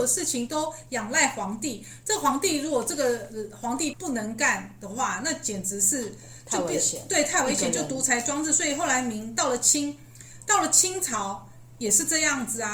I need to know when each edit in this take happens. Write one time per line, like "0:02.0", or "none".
0:03.9

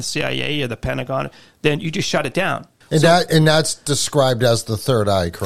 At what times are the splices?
0:02.8

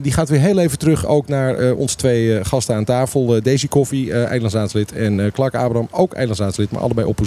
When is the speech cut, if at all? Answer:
none

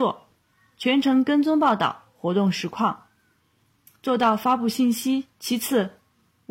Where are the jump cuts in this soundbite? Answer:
0:05.3

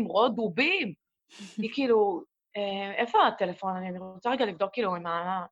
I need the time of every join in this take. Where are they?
0:01.0

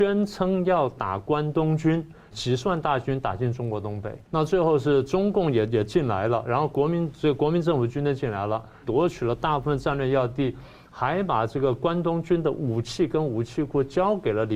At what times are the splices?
0:02.3
0:04.2
0:08.8

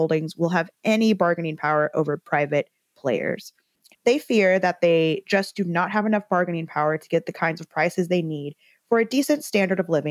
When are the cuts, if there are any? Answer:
0:03.9

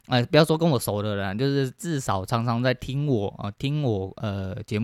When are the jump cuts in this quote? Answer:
none

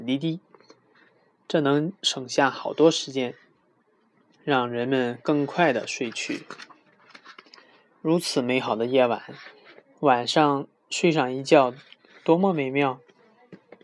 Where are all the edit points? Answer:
none

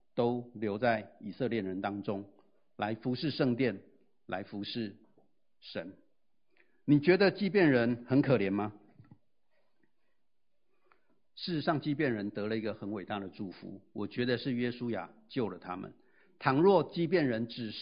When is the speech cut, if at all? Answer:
none

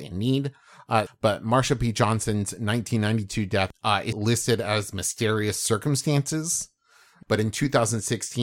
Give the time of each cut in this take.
0:01.1
0:04.1
0:07.2

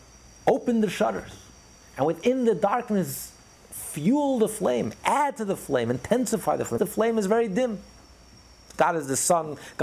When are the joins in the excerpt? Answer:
0:06.8
0:08.7

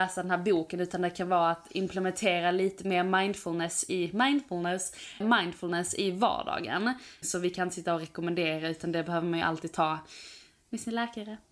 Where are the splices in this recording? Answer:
0:05.2
0:07.2

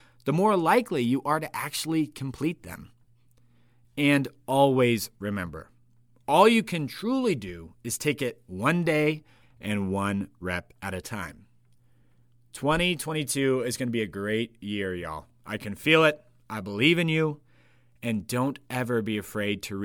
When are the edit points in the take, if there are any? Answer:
0:09.4

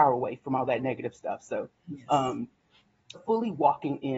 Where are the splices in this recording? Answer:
0:03.1

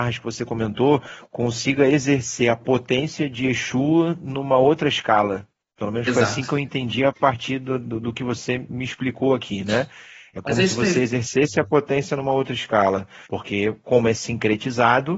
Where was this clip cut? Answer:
0:13.3

